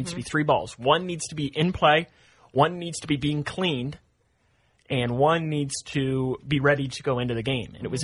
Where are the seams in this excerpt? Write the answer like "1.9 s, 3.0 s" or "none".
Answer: none